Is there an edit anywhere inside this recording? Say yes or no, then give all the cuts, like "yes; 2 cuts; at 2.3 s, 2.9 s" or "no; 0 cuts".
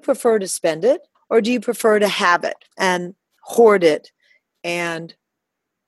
yes; 2 cuts; at 1.1 s, 2.7 s